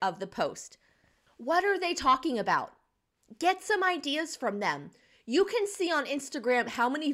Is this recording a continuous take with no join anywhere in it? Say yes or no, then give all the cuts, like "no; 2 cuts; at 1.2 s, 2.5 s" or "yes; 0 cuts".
no; 1 cut; at 1.3 s